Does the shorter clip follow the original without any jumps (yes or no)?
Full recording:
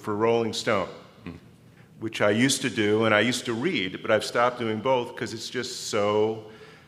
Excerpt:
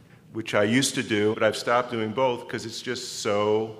no